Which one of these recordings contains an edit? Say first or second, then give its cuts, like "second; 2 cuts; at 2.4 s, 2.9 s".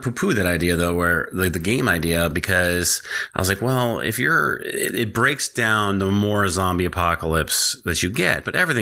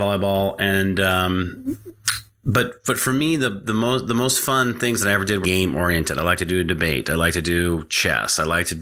second; 1 cut; at 5.4 s